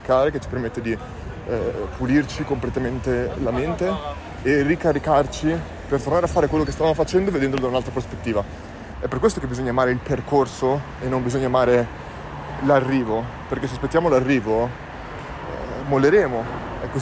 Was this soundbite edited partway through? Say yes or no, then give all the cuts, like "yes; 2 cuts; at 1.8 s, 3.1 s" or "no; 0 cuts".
yes; 1 cut; at 8.9 s